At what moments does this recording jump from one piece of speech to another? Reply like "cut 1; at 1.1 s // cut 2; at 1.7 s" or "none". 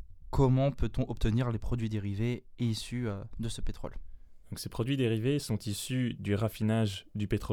none

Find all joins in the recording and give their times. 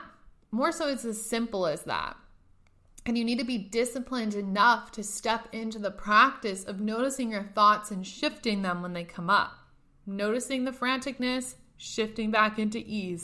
none

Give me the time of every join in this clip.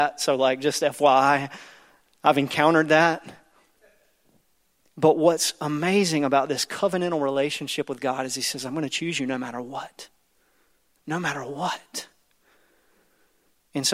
none

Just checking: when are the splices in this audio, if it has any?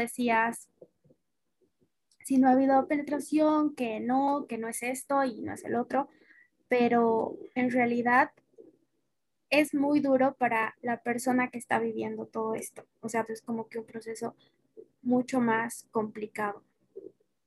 cut 1; at 13.3 s

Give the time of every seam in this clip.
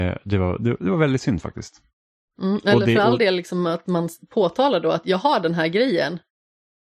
cut 1; at 2.3 s

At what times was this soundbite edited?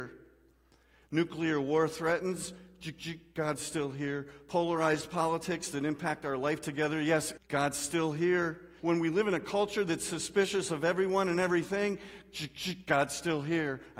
cut 1; at 7.4 s // cut 2; at 8.8 s

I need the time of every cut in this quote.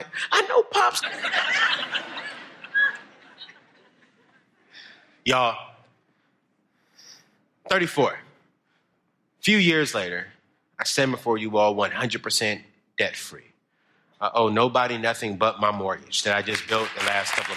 cut 1; at 1.0 s

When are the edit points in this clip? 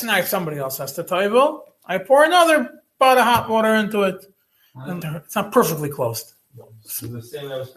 cut 1; at 5.0 s

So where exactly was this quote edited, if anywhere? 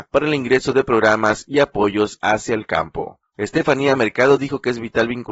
cut 1; at 3.3 s

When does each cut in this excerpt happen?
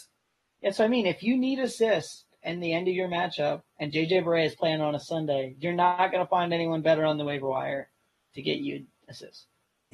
none

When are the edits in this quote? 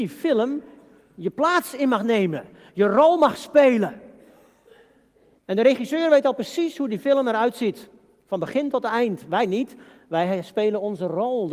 cut 1; at 5.4 s

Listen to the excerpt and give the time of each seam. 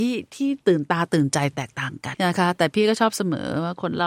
cut 1; at 2.1 s

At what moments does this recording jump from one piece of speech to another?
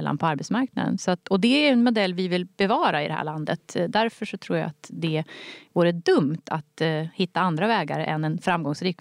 none

